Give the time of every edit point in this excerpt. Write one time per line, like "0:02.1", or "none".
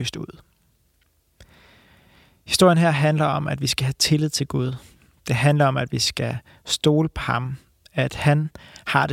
none